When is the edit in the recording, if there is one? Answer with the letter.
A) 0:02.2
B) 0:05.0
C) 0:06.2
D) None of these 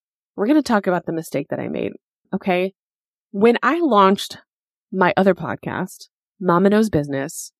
A